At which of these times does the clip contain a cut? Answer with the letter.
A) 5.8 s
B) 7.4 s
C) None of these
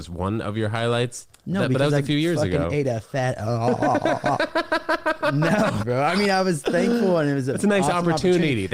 A